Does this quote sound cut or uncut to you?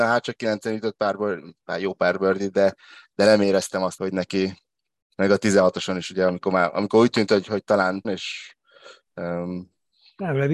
cut